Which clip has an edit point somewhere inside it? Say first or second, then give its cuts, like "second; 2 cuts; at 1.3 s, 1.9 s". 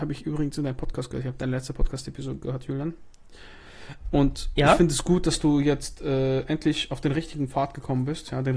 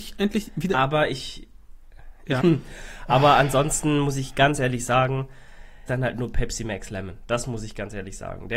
second; 2 cuts; at 2.4 s, 5.9 s